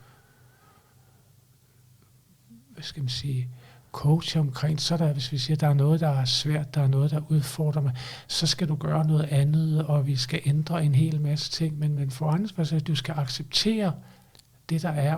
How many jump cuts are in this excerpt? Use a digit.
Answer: 1